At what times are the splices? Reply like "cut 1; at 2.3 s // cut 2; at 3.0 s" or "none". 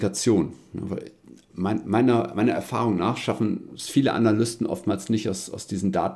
none

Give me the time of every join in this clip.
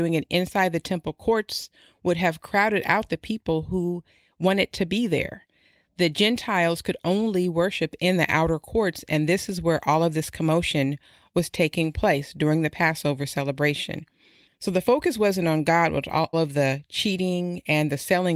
cut 1; at 16.3 s

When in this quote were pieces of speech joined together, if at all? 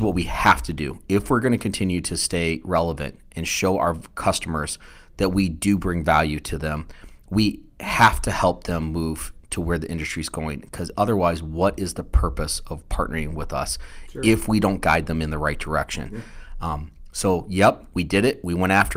none

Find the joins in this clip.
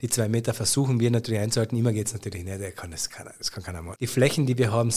cut 1; at 4.0 s

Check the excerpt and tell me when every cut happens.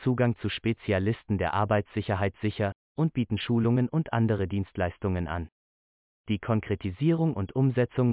cut 1; at 2.8 s // cut 2; at 6.1 s

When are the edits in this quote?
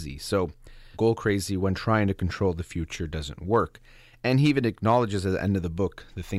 cut 1; at 0.9 s // cut 2; at 4.1 s

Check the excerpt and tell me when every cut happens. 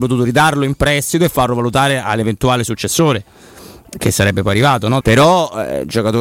cut 1; at 5.0 s

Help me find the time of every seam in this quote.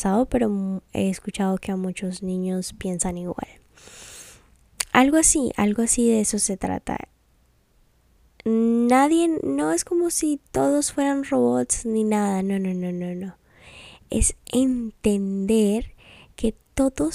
none

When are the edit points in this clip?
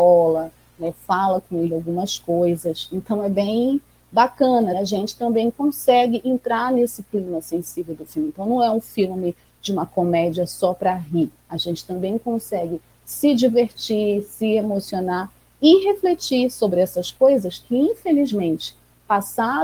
cut 1; at 4.7 s

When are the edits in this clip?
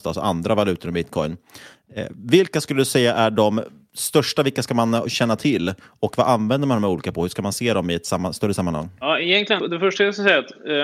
cut 1; at 9.6 s

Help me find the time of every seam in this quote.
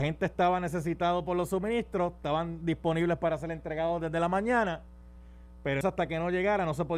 cut 1; at 5.8 s

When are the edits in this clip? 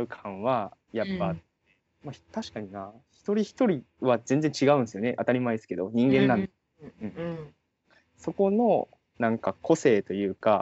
none

